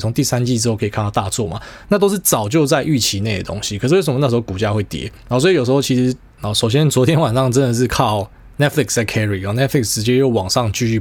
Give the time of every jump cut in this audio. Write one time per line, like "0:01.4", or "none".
0:06.4